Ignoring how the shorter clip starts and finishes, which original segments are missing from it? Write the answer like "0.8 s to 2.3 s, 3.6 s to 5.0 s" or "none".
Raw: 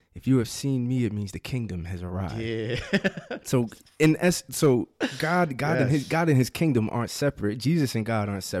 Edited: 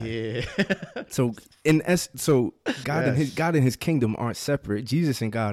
5.2 s to 5.6 s